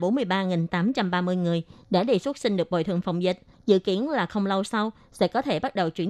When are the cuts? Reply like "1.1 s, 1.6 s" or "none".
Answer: 3.5 s